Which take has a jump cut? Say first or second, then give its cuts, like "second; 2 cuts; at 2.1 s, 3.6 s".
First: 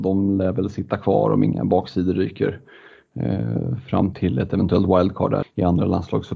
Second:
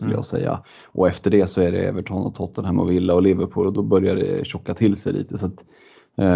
first; 2 cuts; at 4.1 s, 5.4 s